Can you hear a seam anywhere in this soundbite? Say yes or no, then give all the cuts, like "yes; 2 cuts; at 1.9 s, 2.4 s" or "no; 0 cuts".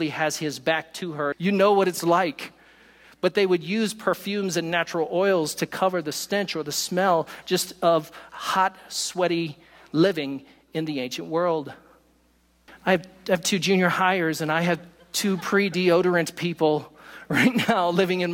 yes; 2 cuts; at 1.3 s, 12.7 s